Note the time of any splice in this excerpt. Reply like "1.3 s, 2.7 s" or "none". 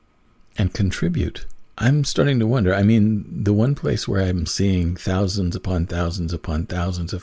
1.7 s, 4.5 s